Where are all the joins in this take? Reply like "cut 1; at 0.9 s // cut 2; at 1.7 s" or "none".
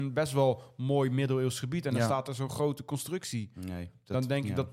none